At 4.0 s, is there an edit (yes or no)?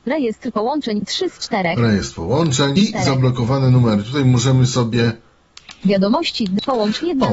no